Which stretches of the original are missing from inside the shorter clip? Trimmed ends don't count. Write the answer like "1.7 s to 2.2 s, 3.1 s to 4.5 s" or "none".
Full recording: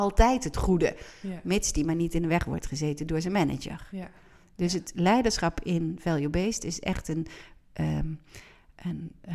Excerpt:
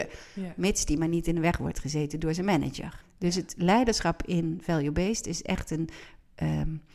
3.9 s to 4.4 s